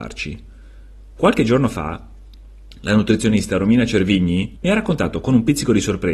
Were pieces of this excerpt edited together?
yes; 1 cut; at 4.6 s

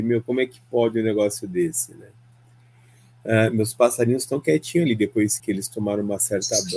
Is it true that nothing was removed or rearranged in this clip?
no; 1 cut; at 5.4 s

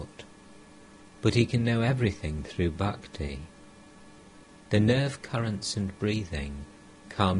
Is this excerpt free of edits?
no; 1 cut; at 4.6 s

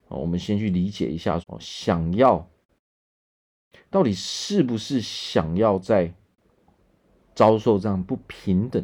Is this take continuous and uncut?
no; 1 cut; at 1.4 s

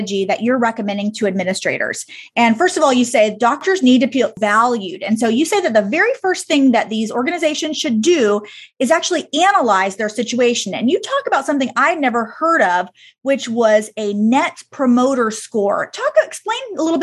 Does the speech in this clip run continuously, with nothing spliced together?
yes; 0 cuts

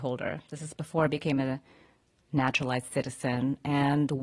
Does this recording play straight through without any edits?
yes; 0 cuts

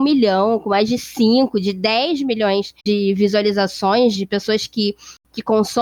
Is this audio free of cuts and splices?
no; 2 cuts; at 2.8 s, 4.1 s

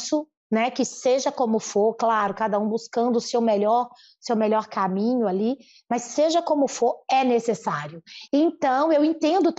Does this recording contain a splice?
yes; 1 cut; at 8.3 s

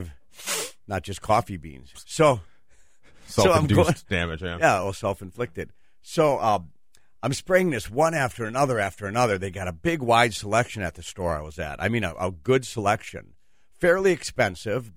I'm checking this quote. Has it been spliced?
no; 0 cuts

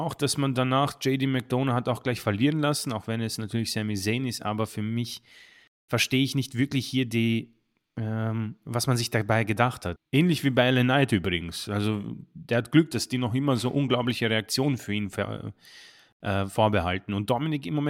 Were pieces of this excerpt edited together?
yes; 1 cut; at 10.0 s

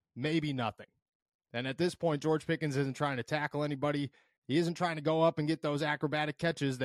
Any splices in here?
yes; 1 cut; at 4.4 s

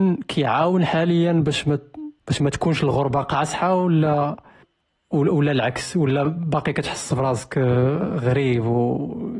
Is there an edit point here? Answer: yes; 1 cut; at 2.2 s

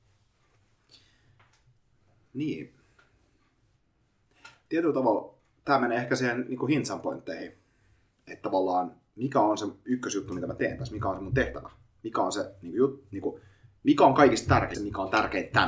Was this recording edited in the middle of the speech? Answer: yes; 1 cut; at 14.7 s

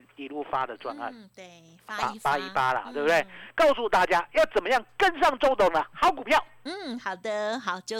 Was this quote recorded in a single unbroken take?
yes; 0 cuts

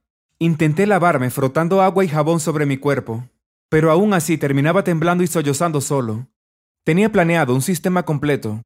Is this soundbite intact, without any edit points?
no; 1 cut; at 6.6 s

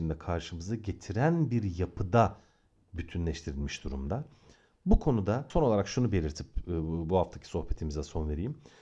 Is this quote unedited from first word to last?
yes; 0 cuts

